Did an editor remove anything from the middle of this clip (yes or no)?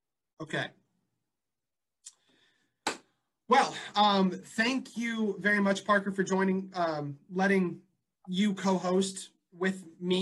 no